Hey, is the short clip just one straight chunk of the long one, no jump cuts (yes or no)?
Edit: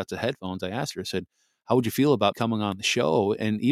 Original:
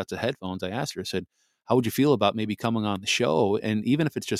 no